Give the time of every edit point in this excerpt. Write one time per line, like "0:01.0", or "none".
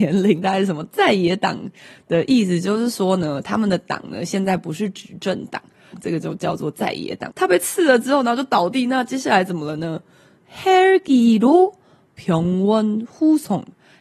0:05.9
0:07.3